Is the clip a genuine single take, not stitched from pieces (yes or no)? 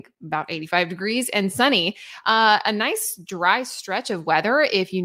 yes